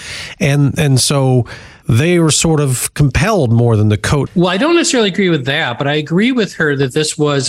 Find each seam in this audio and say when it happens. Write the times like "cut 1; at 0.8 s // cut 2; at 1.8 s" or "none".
cut 1; at 4.3 s